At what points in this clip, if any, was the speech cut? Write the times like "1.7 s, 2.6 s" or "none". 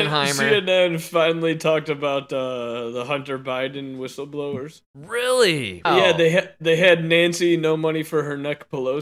5.8 s